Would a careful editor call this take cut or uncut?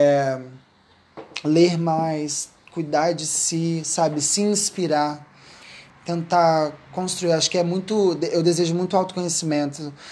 cut